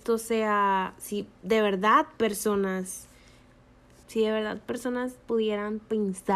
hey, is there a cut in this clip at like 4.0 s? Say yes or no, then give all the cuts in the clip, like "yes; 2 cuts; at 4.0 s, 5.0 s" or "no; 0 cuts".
yes; 1 cut; at 4.0 s